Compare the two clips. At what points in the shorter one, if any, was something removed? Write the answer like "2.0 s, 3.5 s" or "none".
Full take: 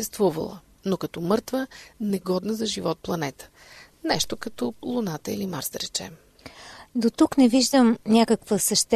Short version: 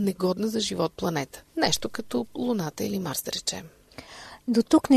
1.5 s